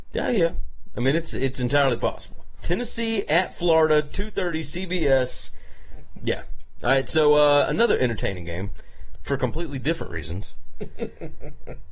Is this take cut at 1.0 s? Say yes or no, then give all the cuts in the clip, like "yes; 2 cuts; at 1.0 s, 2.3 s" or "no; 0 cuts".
no; 2 cuts; at 2.6 s, 6.2 s